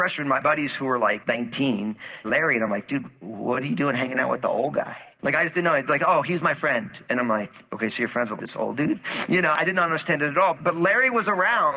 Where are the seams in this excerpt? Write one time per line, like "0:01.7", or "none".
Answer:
0:02.2
0:08.4

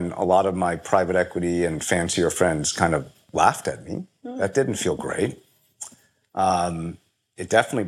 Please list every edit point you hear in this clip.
none

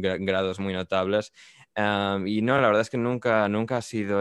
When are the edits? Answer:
none

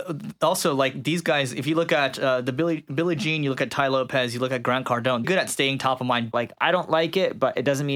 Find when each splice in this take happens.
0:05.2
0:06.3

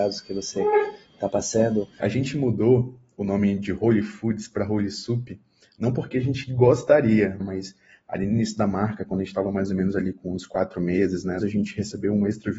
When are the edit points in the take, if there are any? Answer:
0:02.0
0:07.4
0:11.4

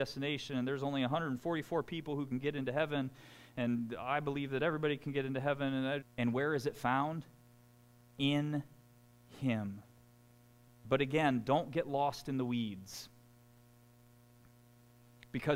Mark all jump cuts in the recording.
0:06.0
0:10.7

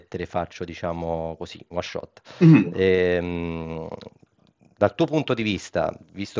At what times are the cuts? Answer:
none

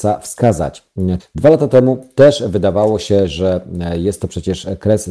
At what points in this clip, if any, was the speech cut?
0:01.2

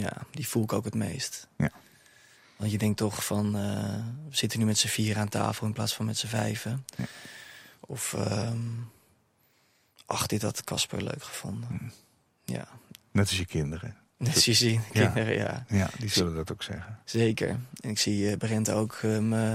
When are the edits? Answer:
none

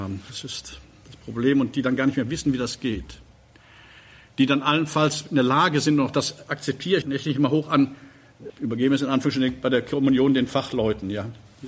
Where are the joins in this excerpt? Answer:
0:07.0
0:08.5

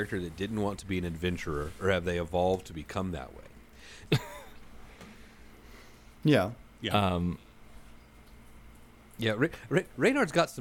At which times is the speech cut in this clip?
0:04.1

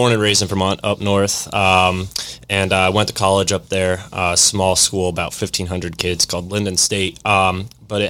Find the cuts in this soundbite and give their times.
none

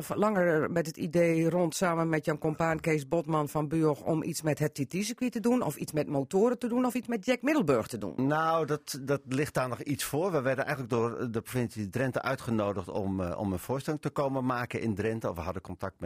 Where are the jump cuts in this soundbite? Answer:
none

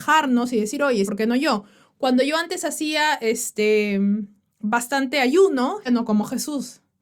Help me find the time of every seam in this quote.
0:01.1
0:05.9

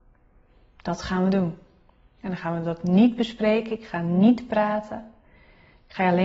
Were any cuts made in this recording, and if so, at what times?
none

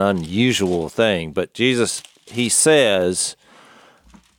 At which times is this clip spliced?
none

